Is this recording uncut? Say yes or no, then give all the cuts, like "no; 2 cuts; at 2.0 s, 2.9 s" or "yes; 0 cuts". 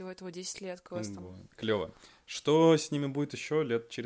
yes; 0 cuts